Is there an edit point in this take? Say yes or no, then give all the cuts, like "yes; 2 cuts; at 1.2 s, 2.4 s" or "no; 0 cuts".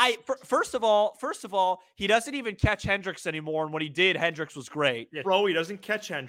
yes; 1 cut; at 5.2 s